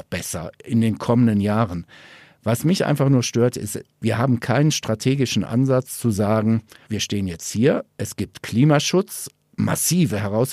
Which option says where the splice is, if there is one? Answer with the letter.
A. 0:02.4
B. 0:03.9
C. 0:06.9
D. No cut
C